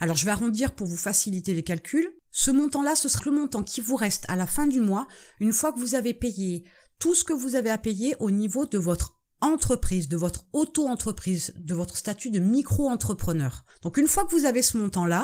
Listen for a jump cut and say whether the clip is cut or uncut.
cut